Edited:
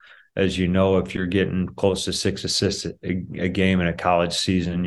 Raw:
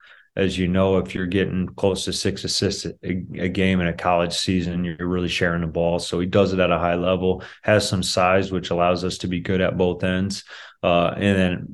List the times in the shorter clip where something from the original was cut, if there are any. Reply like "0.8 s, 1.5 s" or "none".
none